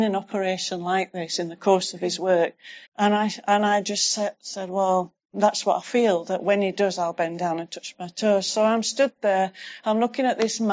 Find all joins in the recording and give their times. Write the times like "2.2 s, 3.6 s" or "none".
2.9 s